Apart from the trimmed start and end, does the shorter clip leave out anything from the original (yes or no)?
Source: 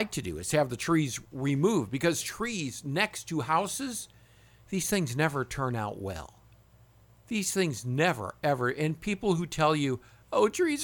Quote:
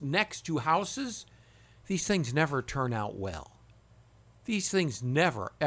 no